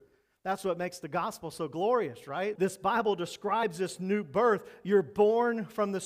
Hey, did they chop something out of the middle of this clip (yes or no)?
yes